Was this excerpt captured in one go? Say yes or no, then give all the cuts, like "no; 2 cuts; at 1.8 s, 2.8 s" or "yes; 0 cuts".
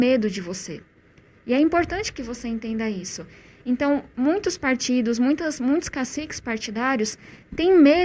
yes; 0 cuts